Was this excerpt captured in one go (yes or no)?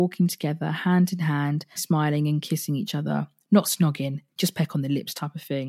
no